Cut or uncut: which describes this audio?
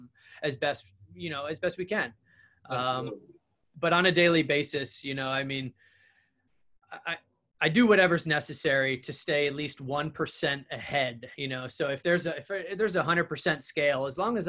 uncut